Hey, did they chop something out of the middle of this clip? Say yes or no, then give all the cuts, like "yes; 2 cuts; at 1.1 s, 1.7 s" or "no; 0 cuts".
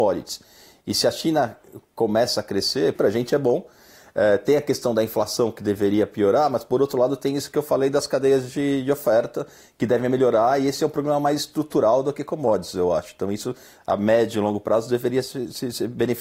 yes; 1 cut; at 3.0 s